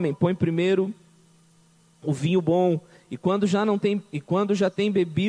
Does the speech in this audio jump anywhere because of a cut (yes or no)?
no